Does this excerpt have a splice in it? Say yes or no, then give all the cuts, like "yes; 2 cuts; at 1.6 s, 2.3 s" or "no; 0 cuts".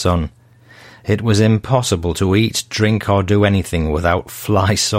no; 0 cuts